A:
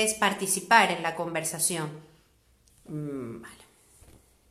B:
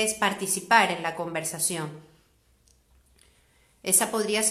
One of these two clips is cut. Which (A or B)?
A